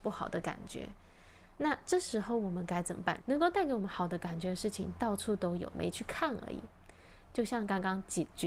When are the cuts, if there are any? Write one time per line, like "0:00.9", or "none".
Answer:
0:03.2
0:05.7